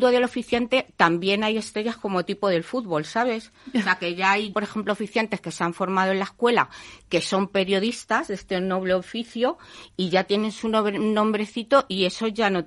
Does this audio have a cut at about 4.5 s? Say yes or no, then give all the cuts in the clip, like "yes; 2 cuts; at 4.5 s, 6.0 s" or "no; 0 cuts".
yes; 1 cut; at 4.5 s